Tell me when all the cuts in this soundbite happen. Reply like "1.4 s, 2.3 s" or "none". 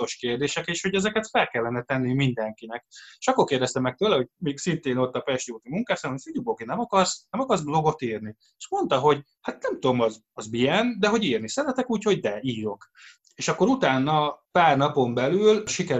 none